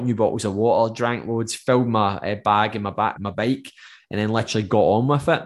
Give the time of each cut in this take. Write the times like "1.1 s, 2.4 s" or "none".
3.2 s